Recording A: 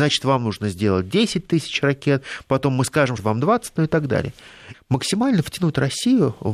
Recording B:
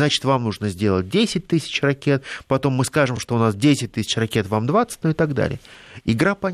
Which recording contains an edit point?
A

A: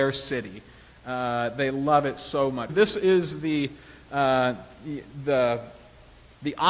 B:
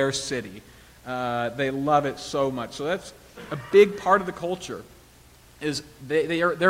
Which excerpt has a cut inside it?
A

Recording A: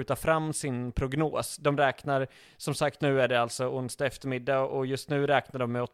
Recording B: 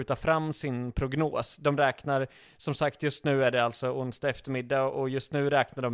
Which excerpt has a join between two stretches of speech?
A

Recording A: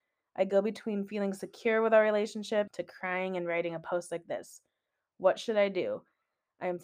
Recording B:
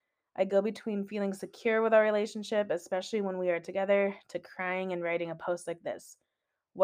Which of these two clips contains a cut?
A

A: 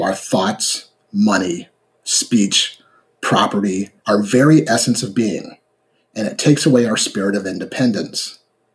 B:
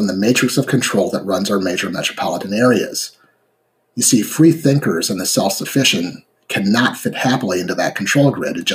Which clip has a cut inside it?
A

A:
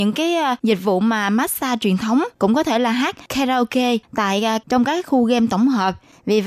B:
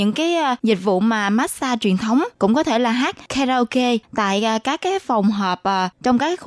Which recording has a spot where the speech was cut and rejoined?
A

